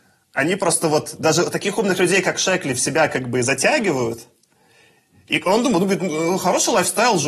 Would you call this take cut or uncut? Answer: cut